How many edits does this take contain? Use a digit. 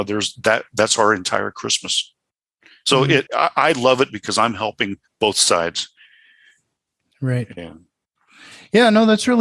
1